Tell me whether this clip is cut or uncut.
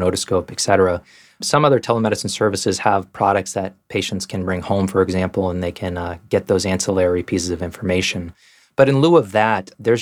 uncut